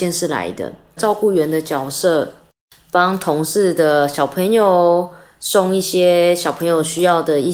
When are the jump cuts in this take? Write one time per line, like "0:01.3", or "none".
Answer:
0:01.0